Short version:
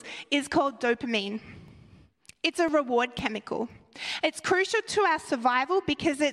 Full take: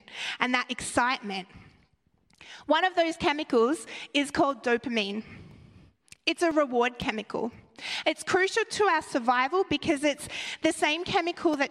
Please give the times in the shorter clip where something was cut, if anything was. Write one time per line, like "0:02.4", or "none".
none